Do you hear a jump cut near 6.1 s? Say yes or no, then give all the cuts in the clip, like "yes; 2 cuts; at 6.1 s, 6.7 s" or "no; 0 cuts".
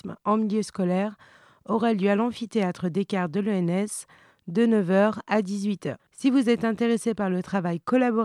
yes; 1 cut; at 6.1 s